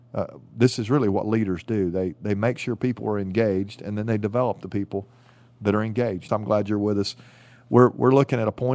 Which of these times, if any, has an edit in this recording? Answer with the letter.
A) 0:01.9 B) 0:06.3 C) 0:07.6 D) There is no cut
B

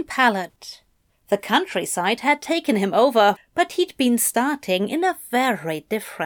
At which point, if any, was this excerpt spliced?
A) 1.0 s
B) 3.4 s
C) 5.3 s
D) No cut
B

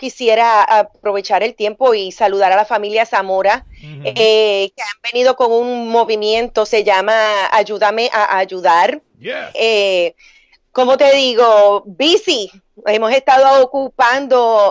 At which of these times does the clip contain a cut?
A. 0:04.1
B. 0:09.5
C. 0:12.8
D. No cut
B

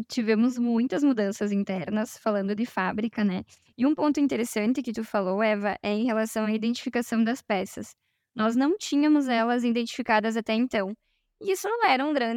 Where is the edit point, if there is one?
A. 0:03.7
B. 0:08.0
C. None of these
C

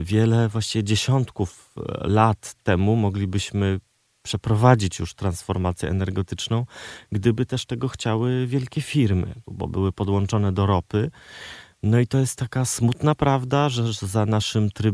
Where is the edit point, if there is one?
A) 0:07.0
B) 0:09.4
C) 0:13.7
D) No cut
B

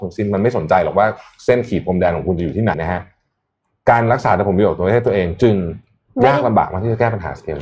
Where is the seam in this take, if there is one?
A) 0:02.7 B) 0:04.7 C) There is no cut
A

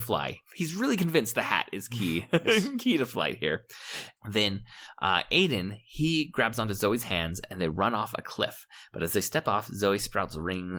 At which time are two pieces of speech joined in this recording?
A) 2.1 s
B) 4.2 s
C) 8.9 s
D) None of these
B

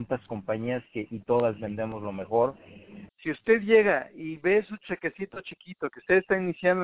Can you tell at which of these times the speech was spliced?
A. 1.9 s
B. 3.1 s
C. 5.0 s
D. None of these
B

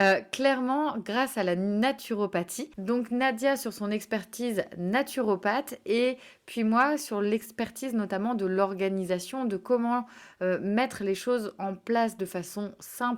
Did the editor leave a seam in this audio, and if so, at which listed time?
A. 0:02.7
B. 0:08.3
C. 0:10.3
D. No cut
A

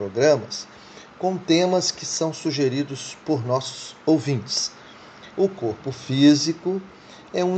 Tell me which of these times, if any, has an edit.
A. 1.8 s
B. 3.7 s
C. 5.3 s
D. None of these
C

